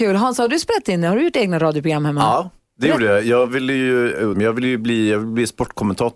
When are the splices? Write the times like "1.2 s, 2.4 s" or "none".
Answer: 2.7 s, 4.3 s

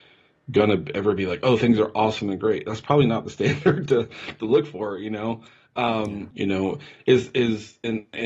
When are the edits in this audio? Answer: 6.3 s

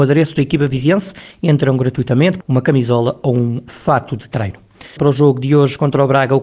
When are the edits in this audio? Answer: 2.4 s, 5.0 s

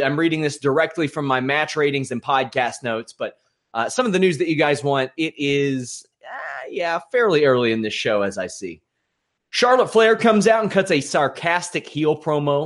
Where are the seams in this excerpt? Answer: none

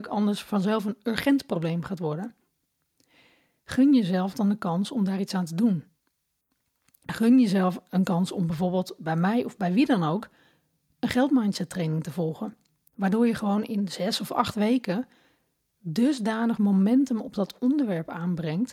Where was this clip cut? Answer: none

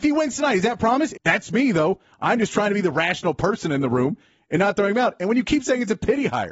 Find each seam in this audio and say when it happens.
1.1 s

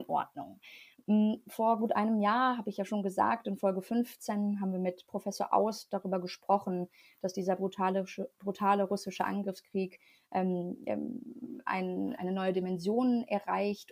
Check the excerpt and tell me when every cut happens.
12.2 s

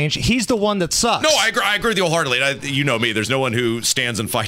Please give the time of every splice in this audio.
none

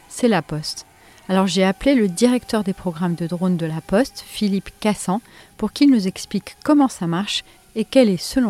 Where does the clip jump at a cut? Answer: none

